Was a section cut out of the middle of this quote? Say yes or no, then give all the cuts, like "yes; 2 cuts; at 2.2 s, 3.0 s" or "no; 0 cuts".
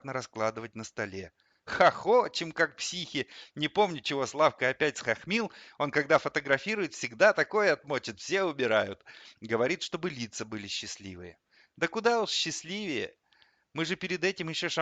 no; 0 cuts